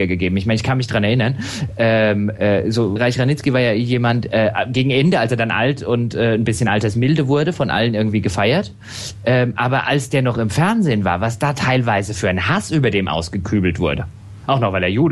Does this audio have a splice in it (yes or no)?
yes